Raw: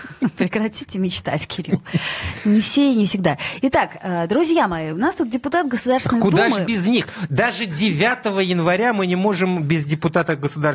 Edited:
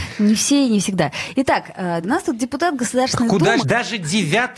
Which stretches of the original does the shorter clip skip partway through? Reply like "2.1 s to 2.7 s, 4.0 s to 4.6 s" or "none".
4.3 s to 4.9 s, 6.5 s to 7.3 s